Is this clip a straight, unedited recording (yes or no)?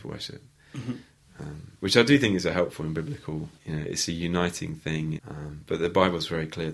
no